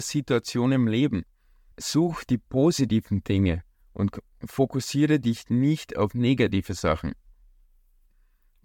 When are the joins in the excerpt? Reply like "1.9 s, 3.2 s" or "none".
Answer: 1.7 s